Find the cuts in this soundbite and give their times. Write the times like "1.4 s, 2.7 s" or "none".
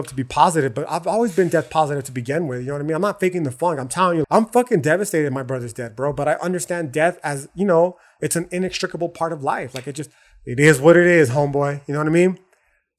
4.2 s